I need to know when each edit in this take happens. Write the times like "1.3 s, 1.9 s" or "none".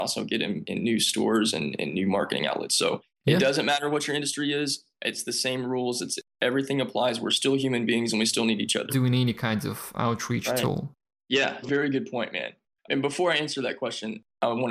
8.9 s, 11.6 s